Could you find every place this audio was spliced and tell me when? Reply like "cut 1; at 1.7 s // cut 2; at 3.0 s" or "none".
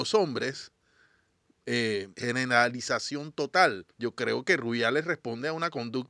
cut 1; at 2.1 s // cut 2; at 3.9 s